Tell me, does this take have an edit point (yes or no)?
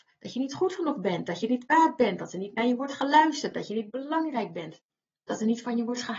no